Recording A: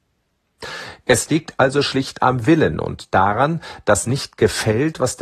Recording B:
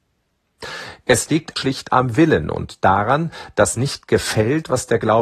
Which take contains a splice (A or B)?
B